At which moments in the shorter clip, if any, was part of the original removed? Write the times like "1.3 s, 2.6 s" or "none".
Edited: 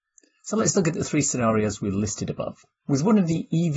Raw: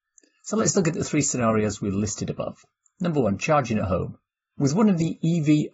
2.8 s